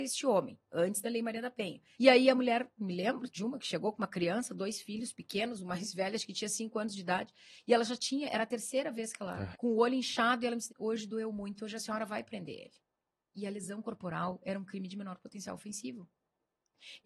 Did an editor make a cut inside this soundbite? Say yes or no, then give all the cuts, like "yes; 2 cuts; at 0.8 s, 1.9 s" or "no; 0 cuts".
yes; 3 cuts; at 1.9 s, 9.5 s, 10.7 s